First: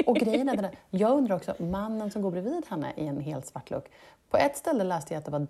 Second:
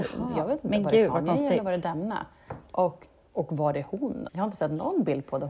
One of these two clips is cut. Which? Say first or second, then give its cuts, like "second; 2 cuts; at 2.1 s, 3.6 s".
second; 2 cuts; at 3.3 s, 4.3 s